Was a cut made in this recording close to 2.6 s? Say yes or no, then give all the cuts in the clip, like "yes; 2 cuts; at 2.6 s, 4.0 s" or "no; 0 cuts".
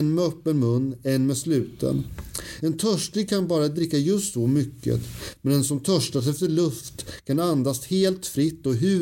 no; 0 cuts